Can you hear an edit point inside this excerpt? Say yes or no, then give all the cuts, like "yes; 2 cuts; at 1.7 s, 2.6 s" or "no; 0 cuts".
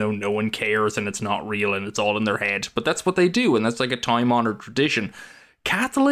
no; 0 cuts